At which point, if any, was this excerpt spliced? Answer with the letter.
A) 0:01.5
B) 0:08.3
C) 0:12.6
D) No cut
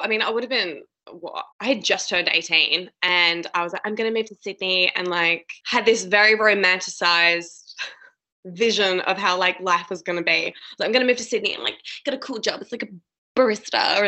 A